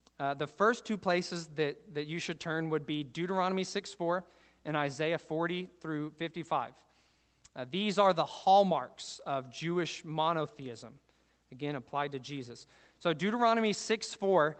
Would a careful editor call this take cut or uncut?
uncut